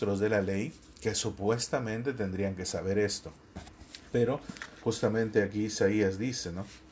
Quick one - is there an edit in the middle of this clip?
no; 0 cuts

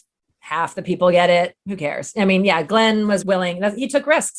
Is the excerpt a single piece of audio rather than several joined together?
no; 1 cut; at 3.2 s

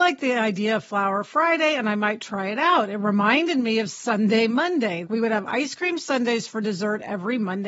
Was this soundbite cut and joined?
yes; 1 cut; at 5.0 s

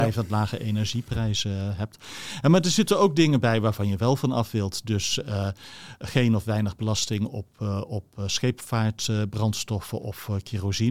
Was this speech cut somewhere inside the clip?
no; 0 cuts

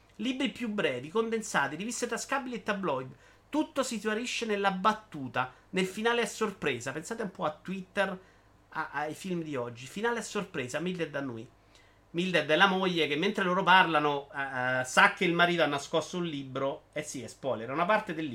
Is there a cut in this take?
no; 0 cuts

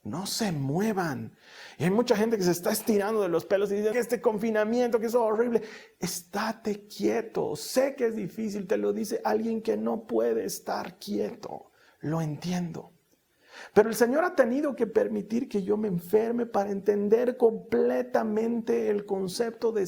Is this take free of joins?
no; 1 cut; at 3.9 s

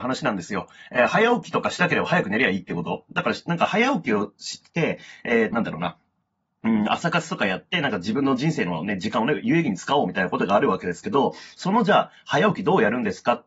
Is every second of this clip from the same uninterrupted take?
no; 1 cut; at 5.5 s

